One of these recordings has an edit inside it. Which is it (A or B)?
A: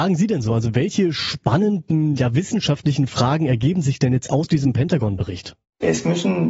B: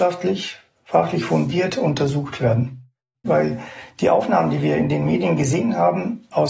B